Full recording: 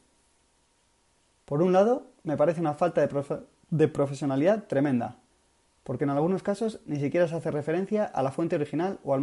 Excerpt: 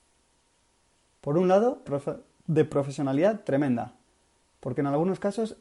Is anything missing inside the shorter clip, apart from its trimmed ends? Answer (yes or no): yes